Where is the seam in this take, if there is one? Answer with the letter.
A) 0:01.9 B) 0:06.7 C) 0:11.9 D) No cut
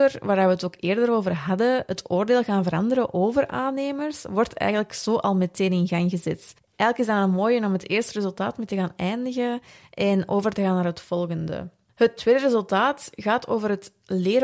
D